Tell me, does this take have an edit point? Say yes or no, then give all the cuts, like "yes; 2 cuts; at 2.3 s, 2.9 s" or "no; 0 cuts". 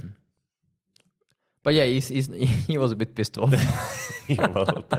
no; 0 cuts